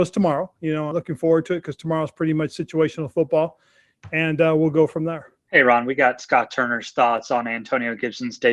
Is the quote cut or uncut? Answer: cut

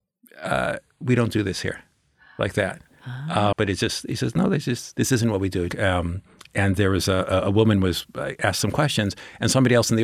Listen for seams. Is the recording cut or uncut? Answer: cut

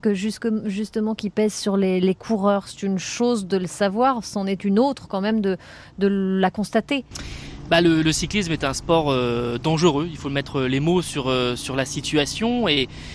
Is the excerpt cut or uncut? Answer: uncut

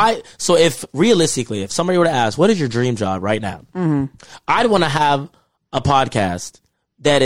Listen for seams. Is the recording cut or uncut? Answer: uncut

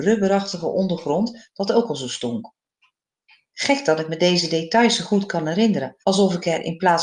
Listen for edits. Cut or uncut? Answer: cut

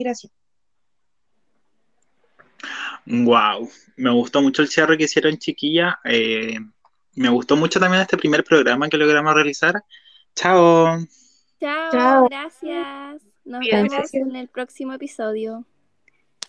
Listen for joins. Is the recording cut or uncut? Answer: cut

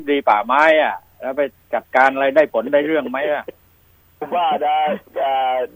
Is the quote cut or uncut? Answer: cut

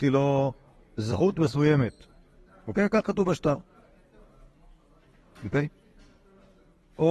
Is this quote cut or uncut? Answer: uncut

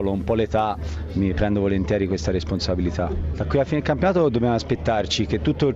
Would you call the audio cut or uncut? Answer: cut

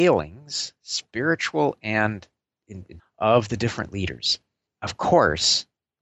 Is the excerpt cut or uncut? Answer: cut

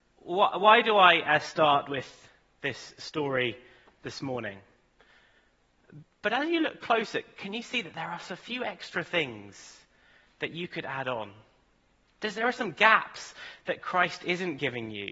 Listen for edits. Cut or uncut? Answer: cut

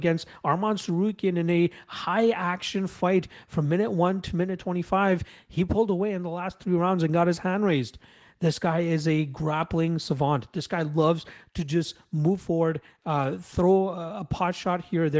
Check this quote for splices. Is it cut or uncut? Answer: uncut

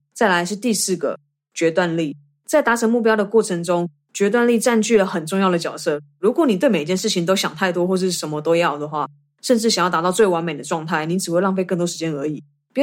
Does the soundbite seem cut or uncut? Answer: uncut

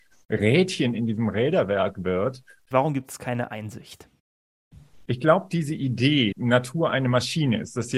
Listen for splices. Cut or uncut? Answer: cut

